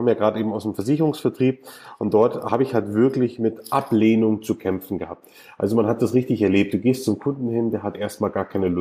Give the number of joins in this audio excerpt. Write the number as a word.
zero